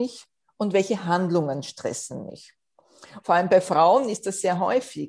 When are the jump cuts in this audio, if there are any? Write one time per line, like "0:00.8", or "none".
0:03.2